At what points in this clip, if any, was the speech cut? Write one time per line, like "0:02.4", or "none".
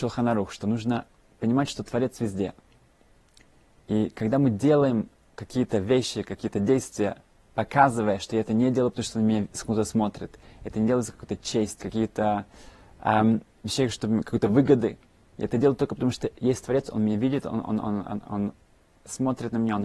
0:11.8

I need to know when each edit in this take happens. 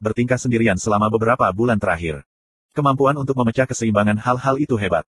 none

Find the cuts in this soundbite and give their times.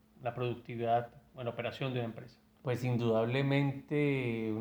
0:02.6

